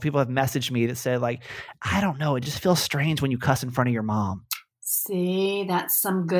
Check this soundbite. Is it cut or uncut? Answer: uncut